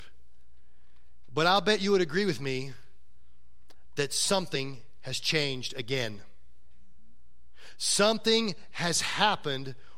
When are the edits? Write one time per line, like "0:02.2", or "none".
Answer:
0:01.3